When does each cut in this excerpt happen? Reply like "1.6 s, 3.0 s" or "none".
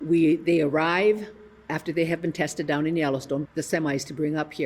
3.4 s